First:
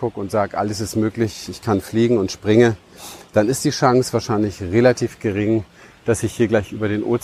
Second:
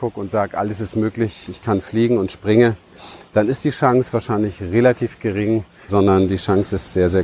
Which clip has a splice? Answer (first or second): second